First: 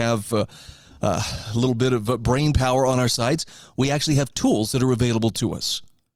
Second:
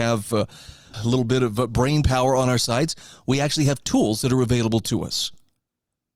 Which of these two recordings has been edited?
second; 1 cut; at 0.9 s

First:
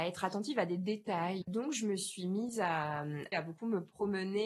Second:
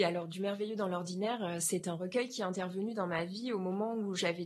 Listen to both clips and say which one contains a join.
first; 2 cuts; at 1.4 s, 3.3 s

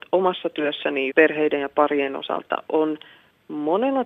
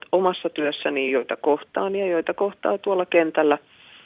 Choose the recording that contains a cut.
first; 1 cut; at 1.1 s

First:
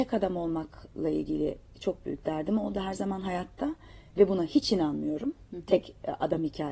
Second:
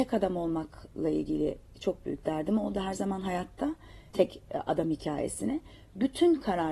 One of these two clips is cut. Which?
second; 1 cut; at 4.1 s

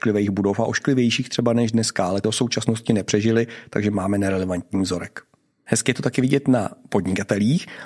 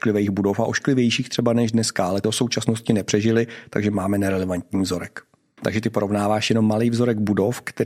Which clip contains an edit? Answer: second; 1 cut; at 5.6 s

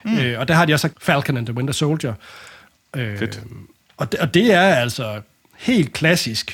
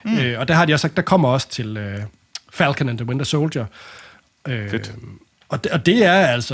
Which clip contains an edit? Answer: first; 1 cut; at 0.9 s

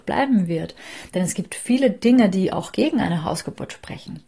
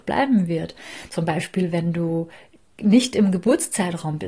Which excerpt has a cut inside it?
second; 1 cut; at 1.1 s

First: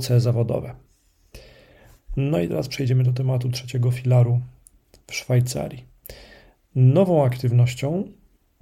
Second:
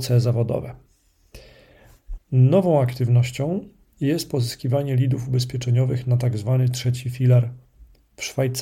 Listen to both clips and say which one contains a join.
second; 2 cuts; at 2.2 s, 3.9 s

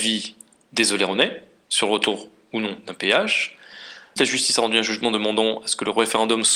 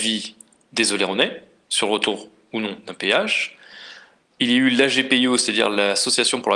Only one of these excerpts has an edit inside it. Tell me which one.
first; 1 cut; at 4.2 s

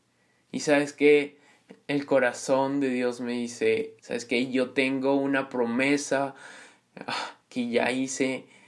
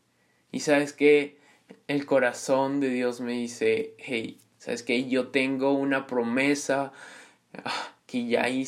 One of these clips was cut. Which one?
first; 1 cut; at 4.0 s

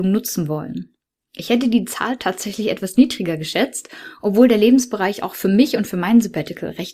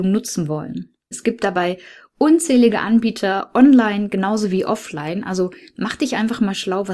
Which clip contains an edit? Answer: second; 1 cut; at 1.1 s

